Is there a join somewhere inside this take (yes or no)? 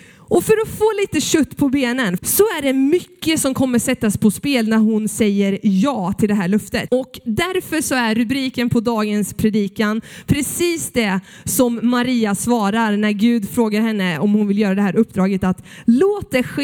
yes